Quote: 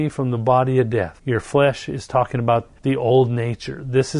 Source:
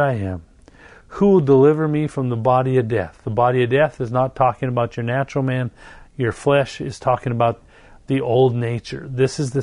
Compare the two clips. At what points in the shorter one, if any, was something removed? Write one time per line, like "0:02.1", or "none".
0:01.2
0:02.8